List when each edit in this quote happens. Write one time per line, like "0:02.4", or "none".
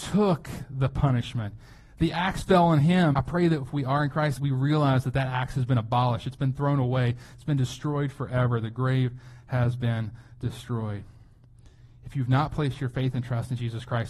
0:03.1
0:04.4